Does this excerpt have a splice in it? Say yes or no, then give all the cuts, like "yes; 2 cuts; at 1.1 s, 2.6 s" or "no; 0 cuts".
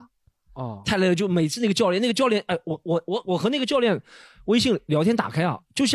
no; 0 cuts